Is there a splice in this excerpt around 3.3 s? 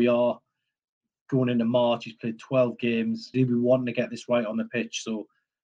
yes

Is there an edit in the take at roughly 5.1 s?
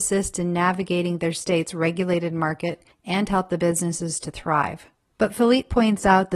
yes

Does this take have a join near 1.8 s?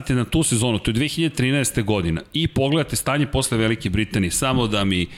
no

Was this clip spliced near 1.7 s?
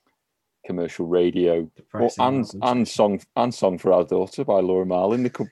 yes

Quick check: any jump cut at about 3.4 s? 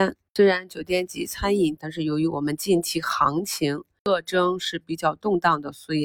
no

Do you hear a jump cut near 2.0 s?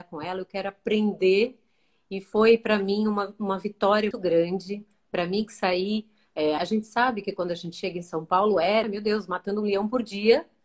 no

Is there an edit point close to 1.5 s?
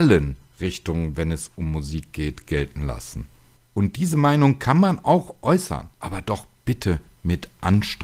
no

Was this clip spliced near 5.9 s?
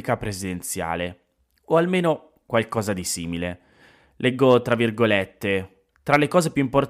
yes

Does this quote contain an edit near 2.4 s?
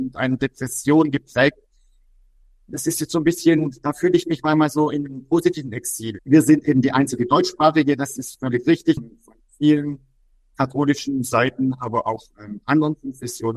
no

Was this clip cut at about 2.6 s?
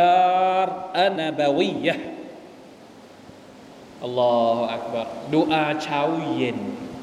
no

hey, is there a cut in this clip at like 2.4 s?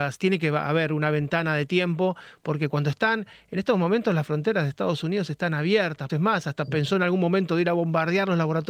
no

